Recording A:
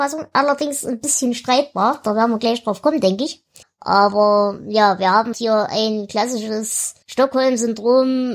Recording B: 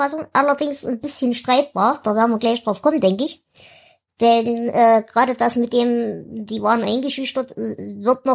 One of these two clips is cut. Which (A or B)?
A